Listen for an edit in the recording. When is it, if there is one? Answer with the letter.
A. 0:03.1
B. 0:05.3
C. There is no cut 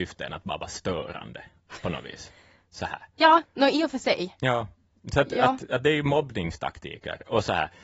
C